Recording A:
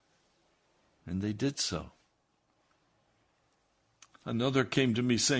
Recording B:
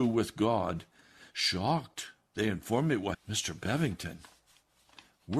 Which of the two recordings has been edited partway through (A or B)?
B